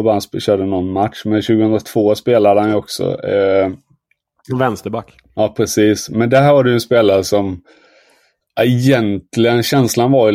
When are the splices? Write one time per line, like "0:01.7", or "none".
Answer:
none